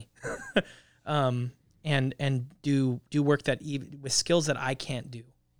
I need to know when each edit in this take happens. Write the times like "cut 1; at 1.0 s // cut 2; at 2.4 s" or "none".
none